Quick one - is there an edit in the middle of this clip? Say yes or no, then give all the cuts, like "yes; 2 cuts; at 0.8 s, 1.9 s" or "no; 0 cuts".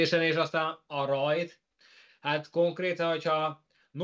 no; 0 cuts